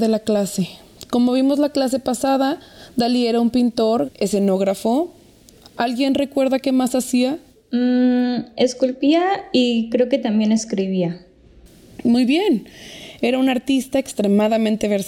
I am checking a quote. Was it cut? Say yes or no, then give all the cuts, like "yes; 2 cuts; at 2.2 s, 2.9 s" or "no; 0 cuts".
yes; 1 cut; at 4.0 s